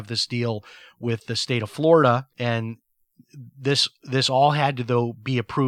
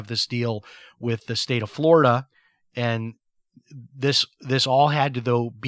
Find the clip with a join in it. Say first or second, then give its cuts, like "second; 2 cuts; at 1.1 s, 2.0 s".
first; 1 cut; at 2.3 s